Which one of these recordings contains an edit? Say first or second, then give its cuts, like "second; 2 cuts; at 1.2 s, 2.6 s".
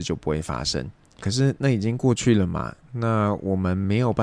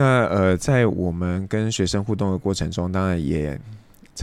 first; 1 cut; at 1.2 s